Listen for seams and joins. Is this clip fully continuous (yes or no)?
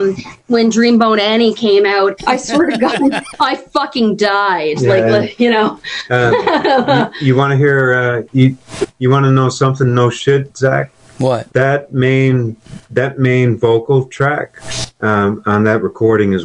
no